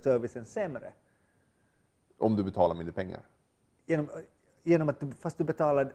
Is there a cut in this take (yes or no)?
no